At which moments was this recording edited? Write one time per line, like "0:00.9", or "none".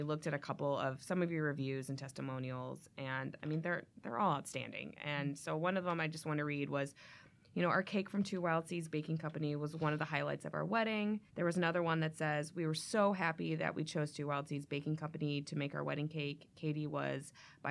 0:11.3